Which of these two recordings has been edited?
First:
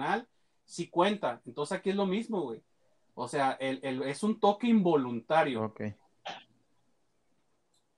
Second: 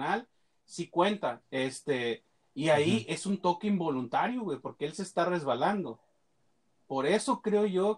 second; 1 cut; at 1.4 s

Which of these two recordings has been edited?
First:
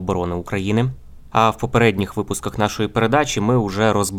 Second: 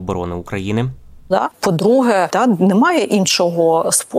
second; 2 cuts; at 1.3 s, 2.3 s

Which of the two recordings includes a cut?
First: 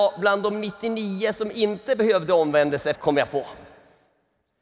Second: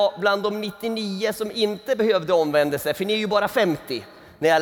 first; 1 cut; at 2.9 s

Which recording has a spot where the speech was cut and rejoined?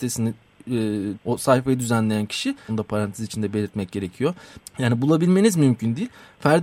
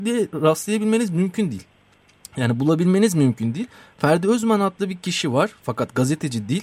first; 3 cuts; at 1.1 s, 2.7 s, 4.6 s

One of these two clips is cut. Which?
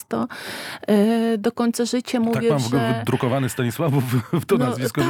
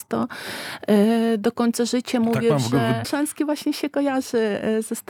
second; 1 cut; at 3.0 s

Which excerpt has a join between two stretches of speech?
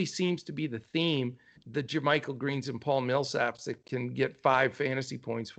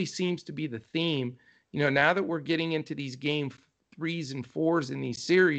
first; 1 cut; at 1.6 s

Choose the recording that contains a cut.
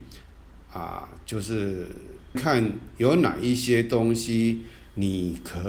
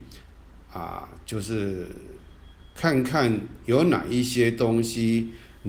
first; 1 cut; at 2.4 s

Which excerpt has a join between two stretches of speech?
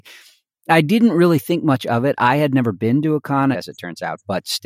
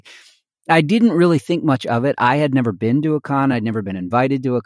first; 1 cut; at 3.5 s

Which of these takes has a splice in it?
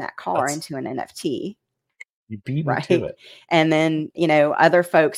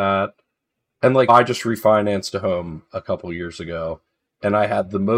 second; 1 cut; at 1.3 s

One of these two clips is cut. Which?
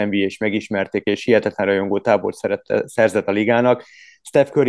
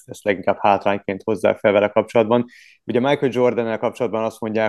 second; 1 cut; at 2.8 s

